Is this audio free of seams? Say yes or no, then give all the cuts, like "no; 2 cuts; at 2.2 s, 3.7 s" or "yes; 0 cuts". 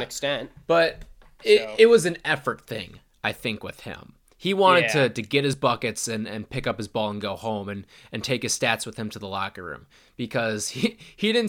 yes; 0 cuts